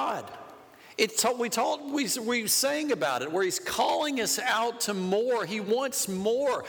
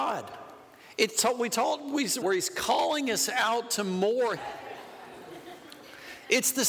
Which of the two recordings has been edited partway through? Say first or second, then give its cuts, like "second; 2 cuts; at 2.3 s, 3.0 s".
second; 2 cuts; at 2.2 s, 4.4 s